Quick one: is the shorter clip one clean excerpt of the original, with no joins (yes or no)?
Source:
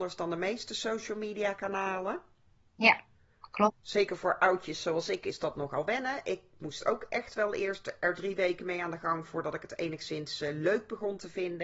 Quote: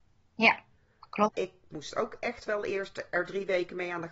no